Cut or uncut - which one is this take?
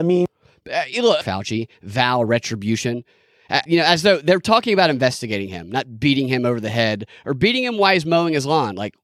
cut